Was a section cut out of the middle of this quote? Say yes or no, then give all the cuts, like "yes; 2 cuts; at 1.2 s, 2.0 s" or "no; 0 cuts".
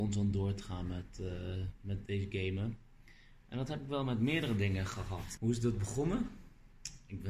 yes; 1 cut; at 5.4 s